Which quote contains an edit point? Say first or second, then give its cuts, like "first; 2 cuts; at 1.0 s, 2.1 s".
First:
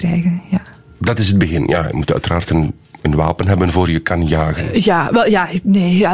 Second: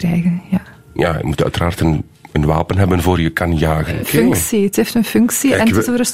second; 2 cuts; at 1.0 s, 4.0 s